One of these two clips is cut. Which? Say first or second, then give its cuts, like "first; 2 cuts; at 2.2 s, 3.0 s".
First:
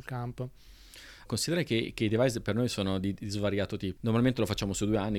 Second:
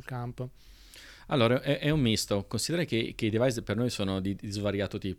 first; 2 cuts; at 1.3 s, 4.0 s